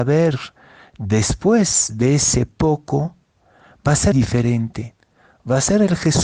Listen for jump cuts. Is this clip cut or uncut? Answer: cut